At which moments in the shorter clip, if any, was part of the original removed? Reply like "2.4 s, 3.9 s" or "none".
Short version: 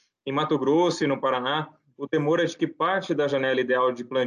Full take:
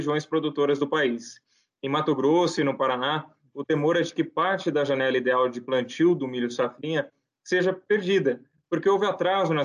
none